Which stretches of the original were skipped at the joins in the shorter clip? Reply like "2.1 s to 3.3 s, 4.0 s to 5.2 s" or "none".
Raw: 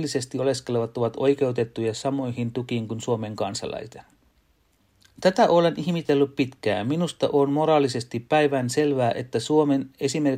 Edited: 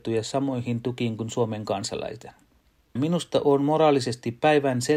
4.7 s to 6.8 s